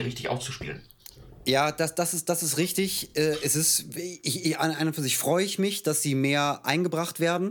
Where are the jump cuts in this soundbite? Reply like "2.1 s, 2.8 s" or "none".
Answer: none

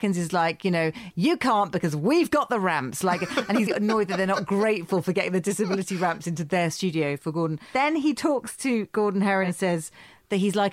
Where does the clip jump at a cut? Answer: 1.1 s, 3.7 s

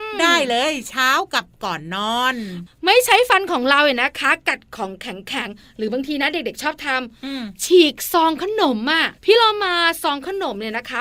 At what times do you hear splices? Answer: 9.2 s

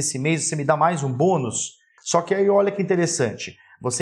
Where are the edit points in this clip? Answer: 2.0 s

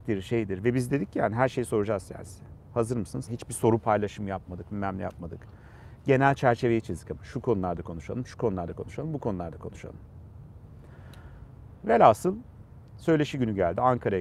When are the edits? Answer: 3.3 s

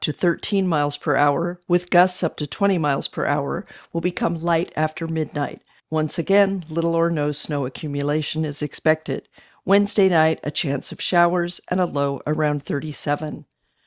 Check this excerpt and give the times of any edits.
5.8 s

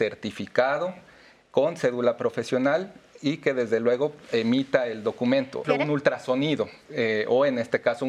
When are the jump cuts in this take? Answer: 5.6 s, 6.9 s

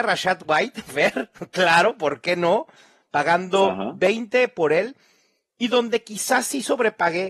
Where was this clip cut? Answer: none

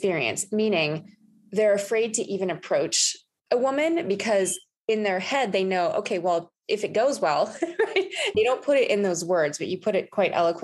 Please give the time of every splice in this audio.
8.3 s

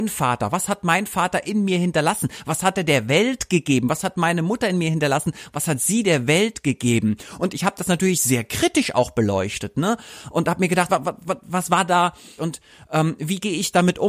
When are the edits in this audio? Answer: 10.9 s, 12.4 s

